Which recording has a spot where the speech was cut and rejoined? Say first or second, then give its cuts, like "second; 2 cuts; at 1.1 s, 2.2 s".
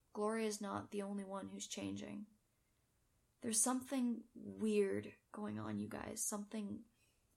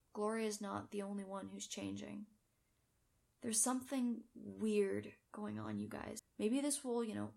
second; 1 cut; at 6.2 s